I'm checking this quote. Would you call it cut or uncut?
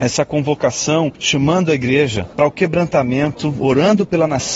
uncut